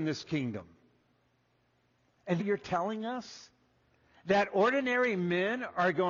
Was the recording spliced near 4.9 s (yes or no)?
no